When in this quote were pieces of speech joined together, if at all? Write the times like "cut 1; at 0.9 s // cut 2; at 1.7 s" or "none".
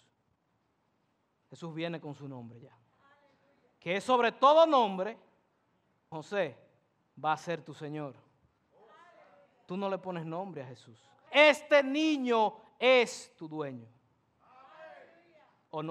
cut 1; at 6.1 s // cut 2; at 11.3 s